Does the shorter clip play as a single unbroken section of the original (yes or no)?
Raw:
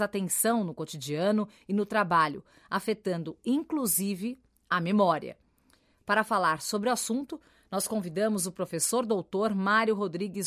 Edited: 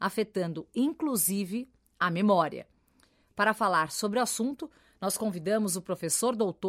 yes